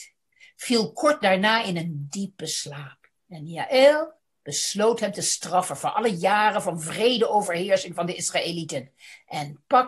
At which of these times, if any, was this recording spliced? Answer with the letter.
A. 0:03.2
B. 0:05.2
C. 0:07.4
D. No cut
A